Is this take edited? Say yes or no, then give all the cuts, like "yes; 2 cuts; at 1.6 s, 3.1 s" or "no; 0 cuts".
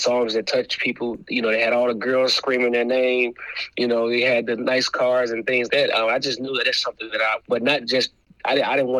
yes; 2 cuts; at 5.7 s, 7.4 s